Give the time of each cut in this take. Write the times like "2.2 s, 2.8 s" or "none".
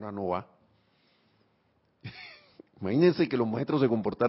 none